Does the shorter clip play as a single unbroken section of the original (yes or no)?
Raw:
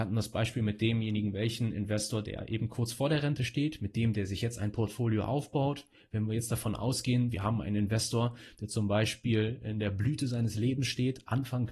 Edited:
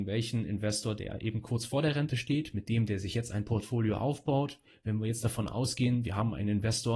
yes